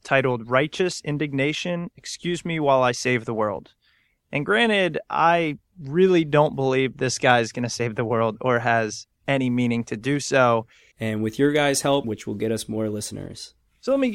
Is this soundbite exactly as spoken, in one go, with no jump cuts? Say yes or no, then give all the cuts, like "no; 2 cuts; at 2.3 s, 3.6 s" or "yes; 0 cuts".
no; 2 cuts; at 10.9 s, 12.0 s